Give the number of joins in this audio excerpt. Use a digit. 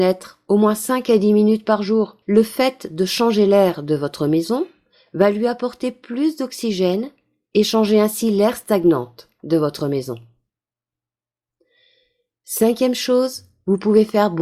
1